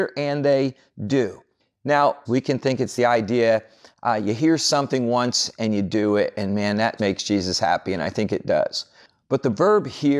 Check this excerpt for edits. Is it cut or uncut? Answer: cut